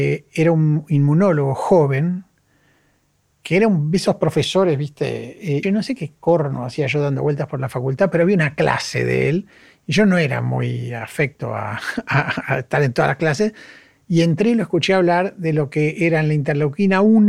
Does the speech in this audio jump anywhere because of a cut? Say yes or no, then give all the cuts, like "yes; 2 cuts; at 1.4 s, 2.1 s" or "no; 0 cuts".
yes; 1 cut; at 5.6 s